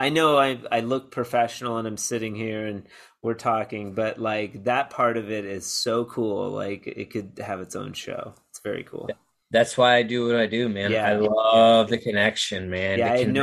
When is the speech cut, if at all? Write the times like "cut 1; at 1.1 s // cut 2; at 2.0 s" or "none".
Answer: none